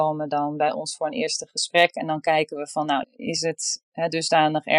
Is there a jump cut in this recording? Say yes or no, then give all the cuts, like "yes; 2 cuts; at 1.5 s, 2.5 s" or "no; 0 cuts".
yes; 1 cut; at 3.0 s